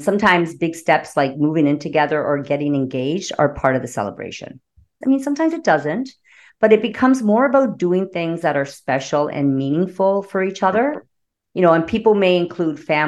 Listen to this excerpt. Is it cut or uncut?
cut